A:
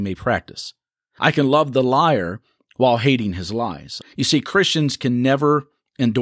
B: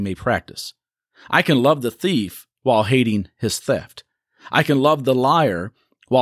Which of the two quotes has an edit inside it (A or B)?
A